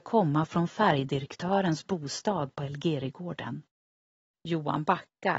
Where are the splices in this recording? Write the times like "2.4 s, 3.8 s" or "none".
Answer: 4.3 s